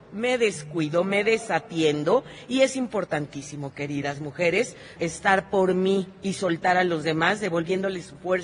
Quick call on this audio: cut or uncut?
cut